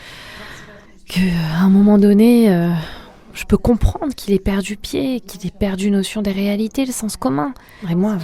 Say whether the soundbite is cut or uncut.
uncut